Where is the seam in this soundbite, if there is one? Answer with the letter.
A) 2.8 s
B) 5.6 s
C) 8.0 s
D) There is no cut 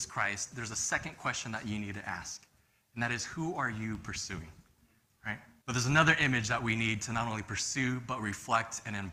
B